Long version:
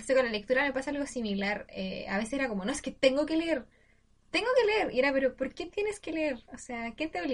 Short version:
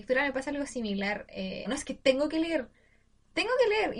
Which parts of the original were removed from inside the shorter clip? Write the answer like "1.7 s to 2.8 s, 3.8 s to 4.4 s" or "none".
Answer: 2.1 s to 2.6 s